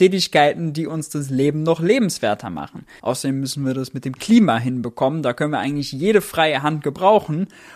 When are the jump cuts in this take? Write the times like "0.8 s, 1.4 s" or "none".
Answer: 3.0 s